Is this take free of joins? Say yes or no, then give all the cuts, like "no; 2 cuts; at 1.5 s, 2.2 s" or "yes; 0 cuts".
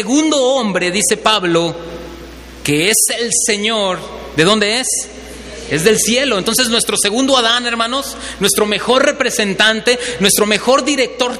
yes; 0 cuts